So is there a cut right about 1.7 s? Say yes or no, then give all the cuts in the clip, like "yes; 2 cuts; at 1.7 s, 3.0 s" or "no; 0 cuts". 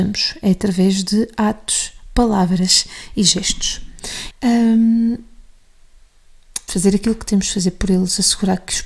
no; 2 cuts; at 4.3 s, 6.7 s